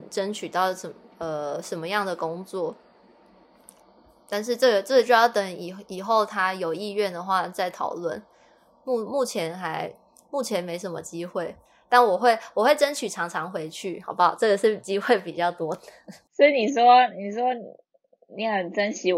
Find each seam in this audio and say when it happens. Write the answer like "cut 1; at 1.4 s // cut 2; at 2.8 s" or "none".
none